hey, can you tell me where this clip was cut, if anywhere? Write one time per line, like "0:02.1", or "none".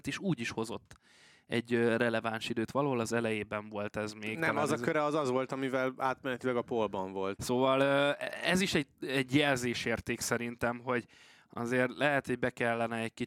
0:07.4